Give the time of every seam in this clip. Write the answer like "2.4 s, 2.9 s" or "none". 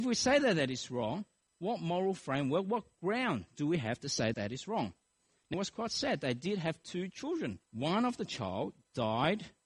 4.3 s, 5.5 s, 7.6 s

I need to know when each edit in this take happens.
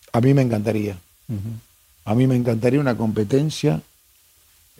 none

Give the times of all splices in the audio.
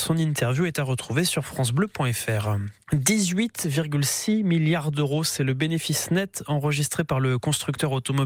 2.8 s

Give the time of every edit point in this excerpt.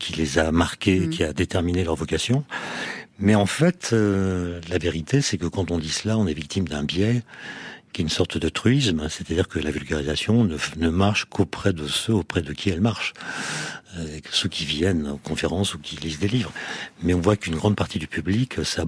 none

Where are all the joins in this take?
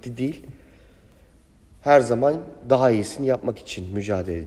none

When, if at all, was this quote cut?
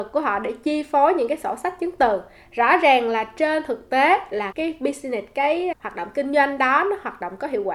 4.5 s, 5.7 s

